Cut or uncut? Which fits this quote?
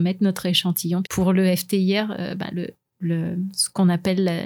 cut